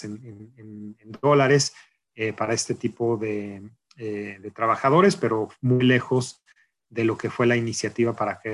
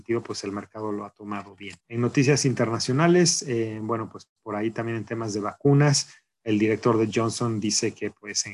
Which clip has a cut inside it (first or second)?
second